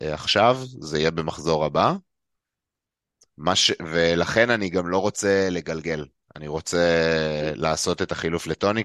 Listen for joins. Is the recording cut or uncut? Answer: uncut